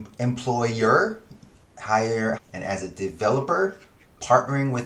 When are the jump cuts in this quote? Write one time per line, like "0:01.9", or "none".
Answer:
0:02.3